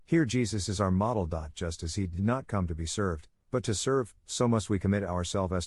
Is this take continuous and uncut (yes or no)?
yes